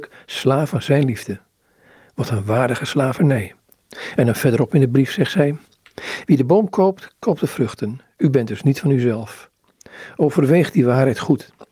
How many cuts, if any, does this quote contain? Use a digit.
1